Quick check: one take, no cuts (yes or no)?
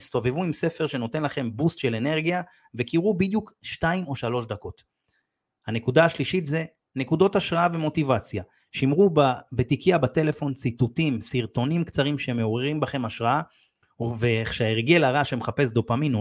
yes